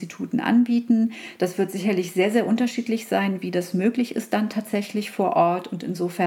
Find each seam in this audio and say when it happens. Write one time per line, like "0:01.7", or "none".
none